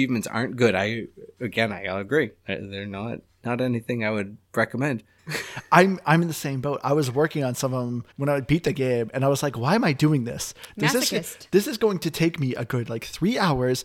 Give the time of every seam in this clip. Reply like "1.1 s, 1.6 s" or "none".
5.2 s, 8.1 s